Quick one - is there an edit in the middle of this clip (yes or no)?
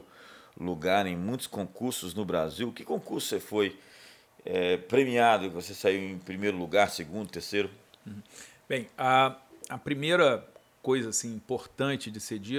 no